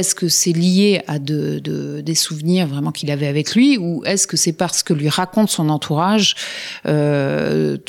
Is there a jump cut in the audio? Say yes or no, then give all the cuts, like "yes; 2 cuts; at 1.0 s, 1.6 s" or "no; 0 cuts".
no; 0 cuts